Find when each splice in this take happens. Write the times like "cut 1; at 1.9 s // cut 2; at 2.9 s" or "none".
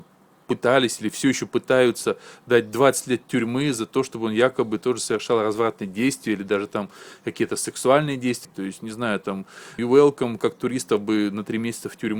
cut 1; at 8.4 s // cut 2; at 9.8 s